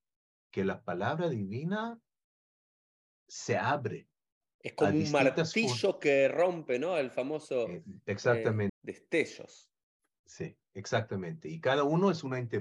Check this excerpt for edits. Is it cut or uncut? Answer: cut